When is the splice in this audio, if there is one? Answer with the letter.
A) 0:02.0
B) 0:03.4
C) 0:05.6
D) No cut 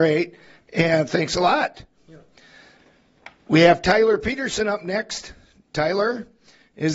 D